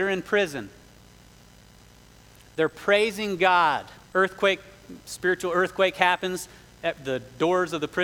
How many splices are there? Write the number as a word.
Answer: one